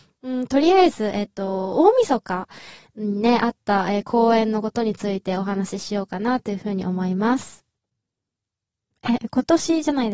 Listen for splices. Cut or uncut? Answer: uncut